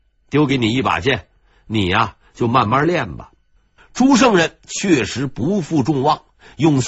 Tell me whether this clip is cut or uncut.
cut